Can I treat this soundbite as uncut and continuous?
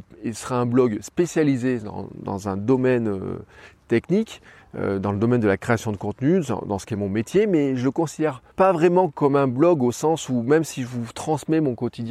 no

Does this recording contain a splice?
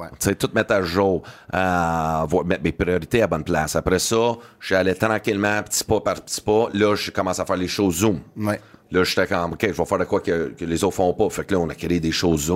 no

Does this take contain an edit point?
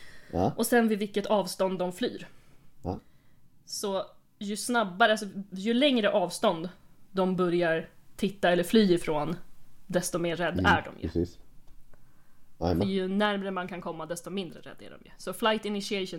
no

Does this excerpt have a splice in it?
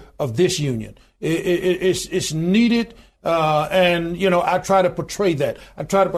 no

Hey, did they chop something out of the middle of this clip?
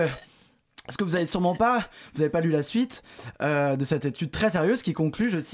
no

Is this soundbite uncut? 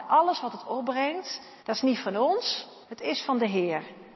no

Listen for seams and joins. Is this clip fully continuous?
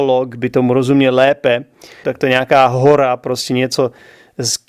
no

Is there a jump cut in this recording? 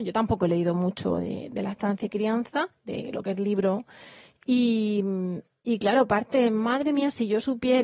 no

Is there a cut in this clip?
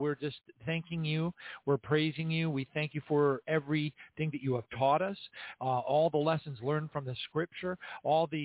no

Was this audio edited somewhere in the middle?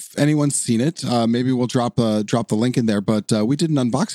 no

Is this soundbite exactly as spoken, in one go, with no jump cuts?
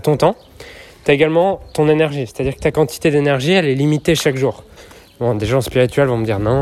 yes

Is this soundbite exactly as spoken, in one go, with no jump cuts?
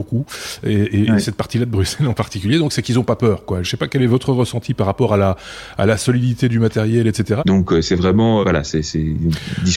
no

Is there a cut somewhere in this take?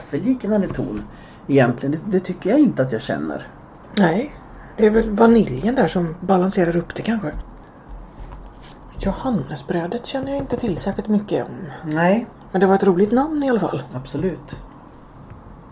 no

